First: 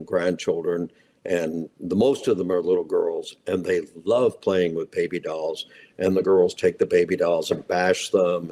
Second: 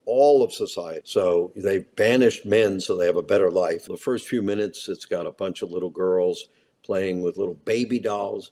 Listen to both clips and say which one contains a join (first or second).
second